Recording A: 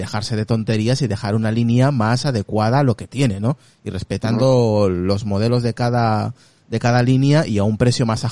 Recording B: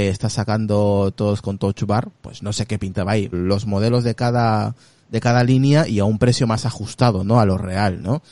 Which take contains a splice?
B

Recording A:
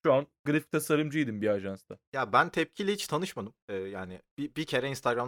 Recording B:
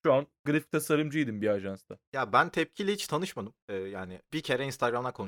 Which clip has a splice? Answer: B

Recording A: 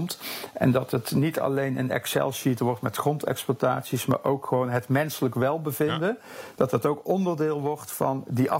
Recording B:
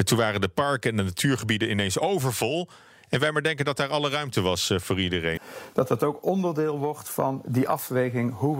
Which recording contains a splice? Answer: B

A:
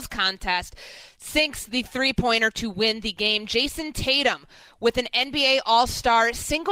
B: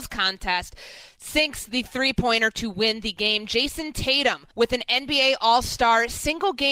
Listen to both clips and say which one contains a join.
B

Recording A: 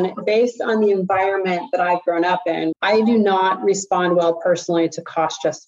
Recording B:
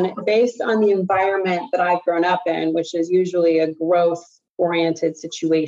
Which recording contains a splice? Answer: A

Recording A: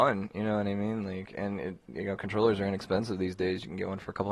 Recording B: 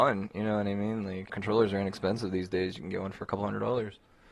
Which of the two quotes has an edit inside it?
B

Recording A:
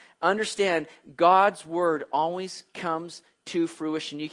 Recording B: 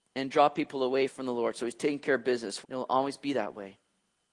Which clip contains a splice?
B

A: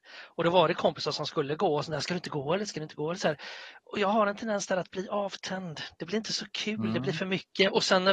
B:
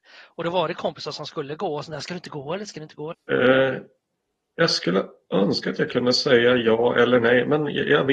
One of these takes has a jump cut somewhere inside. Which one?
B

